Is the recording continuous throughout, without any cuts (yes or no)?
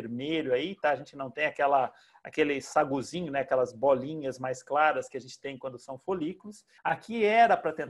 no